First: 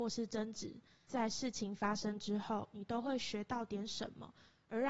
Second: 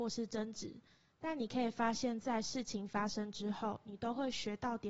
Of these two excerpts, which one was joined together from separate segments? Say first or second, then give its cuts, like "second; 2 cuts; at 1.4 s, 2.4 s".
first; 1 cut; at 1.1 s